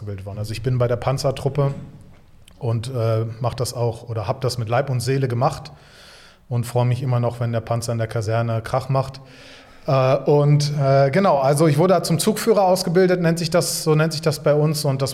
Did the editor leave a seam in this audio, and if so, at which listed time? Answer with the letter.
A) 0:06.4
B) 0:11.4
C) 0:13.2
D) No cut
D